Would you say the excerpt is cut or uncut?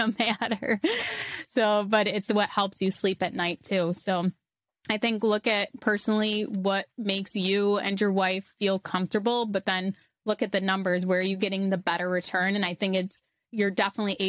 uncut